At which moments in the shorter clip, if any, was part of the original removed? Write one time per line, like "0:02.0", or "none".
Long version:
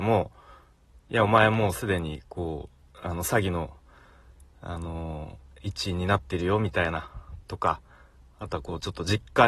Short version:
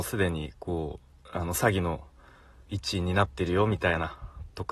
0:02.7